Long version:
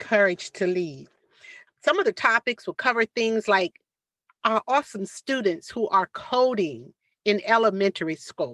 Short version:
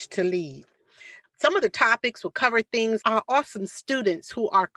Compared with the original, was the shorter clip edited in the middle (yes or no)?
yes